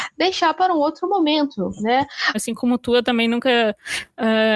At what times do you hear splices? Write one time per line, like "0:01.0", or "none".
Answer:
0:02.3